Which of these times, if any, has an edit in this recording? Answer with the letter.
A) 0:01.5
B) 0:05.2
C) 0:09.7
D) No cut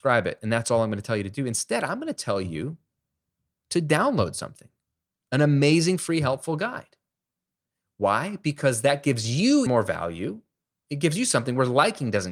C